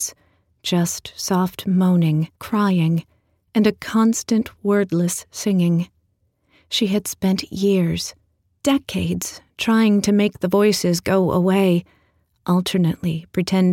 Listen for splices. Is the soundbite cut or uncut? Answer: cut